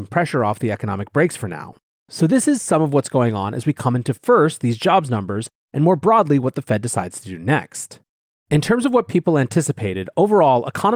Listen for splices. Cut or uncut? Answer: cut